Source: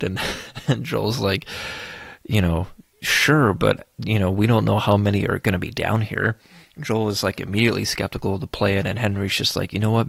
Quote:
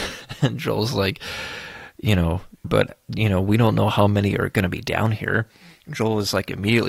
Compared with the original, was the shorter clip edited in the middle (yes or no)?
yes